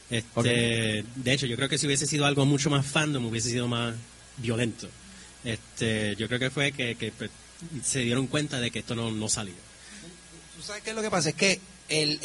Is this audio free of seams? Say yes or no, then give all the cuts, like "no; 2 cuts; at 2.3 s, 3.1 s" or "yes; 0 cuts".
yes; 0 cuts